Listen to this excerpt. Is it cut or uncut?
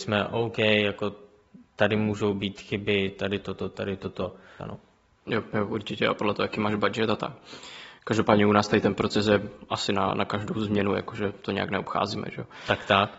cut